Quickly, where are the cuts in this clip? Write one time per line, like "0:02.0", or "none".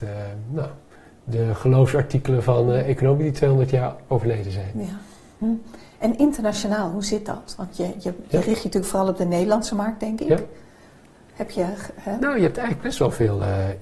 none